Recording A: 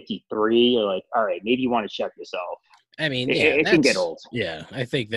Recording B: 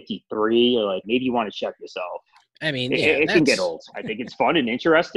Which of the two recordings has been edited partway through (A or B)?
B